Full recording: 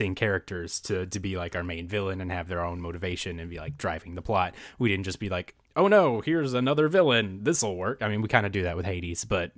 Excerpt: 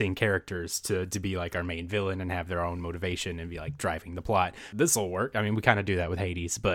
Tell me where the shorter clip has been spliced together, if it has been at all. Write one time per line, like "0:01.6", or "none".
0:04.7

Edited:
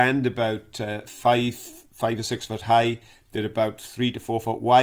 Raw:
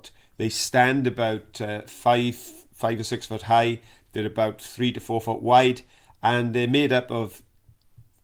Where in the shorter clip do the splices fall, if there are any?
none

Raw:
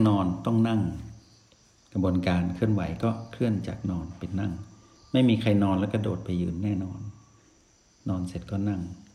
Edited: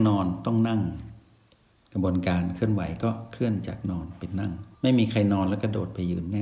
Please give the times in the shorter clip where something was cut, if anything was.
0:04.7

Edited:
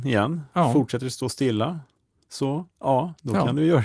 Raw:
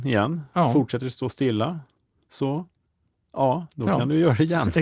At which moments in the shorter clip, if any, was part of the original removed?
0:02.7

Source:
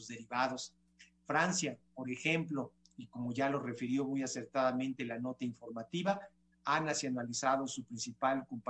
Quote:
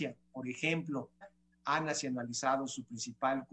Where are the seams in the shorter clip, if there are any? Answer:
0:01.2

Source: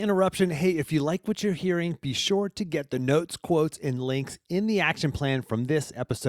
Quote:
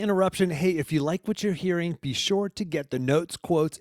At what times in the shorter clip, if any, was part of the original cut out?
none

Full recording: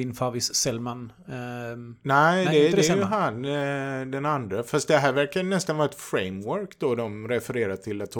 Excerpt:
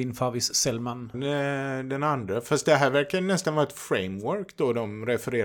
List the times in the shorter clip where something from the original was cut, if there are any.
0:01.1

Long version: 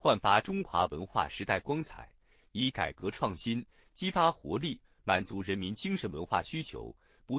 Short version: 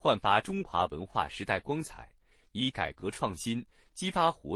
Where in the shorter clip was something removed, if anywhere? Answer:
none

